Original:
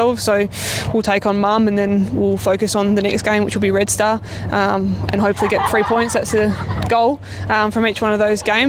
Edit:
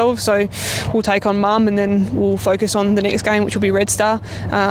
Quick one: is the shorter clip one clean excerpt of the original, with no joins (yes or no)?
yes